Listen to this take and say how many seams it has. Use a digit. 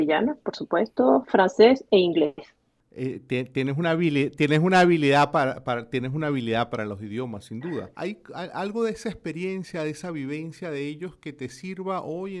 1